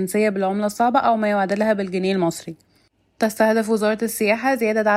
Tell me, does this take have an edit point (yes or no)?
no